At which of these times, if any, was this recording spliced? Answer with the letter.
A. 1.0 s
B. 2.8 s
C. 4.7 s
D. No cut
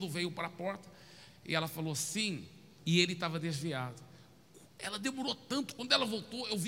B